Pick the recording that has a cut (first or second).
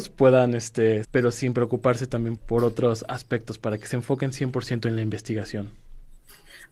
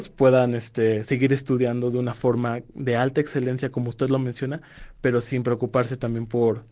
first